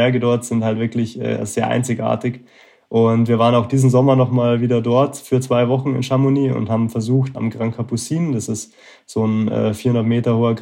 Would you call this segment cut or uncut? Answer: cut